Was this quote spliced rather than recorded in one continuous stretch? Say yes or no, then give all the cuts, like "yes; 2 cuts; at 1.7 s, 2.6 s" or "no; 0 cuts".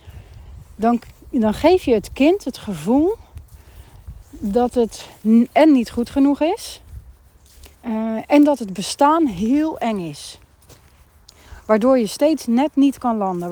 yes; 1 cut; at 7.7 s